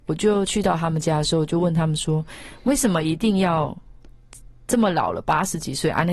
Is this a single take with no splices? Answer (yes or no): yes